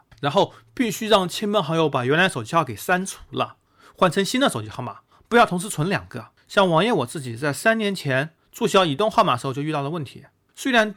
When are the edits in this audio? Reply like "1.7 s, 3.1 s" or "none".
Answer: none

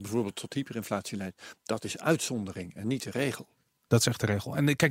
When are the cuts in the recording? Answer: 3.7 s

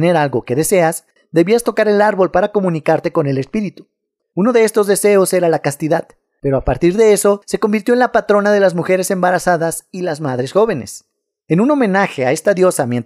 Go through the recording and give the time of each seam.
1.2 s, 4.2 s

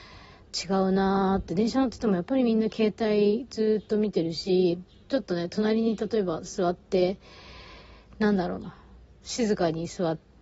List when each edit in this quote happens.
none

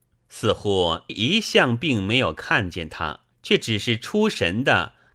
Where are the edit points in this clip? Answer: 1.1 s, 3.3 s

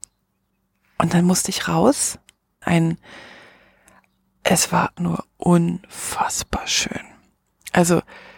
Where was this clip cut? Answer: 2.6 s, 5.0 s

